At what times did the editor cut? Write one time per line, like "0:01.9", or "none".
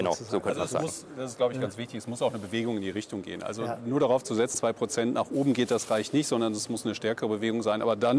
0:04.5